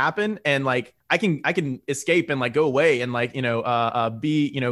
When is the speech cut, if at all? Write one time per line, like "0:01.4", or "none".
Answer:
0:01.0